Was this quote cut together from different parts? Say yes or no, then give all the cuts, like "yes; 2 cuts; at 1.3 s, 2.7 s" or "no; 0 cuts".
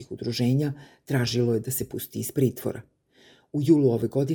no; 0 cuts